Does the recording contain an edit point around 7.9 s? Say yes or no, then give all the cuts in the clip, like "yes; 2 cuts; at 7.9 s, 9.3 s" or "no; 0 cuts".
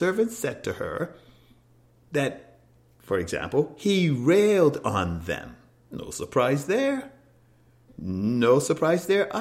yes; 1 cut; at 7.9 s